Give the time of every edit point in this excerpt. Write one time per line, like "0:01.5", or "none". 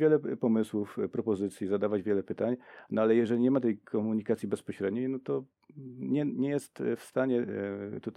none